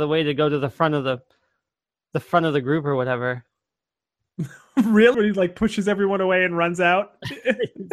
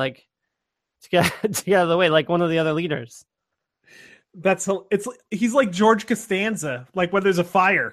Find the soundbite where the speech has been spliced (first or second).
first